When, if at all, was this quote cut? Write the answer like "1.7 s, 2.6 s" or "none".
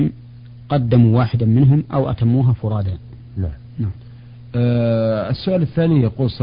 none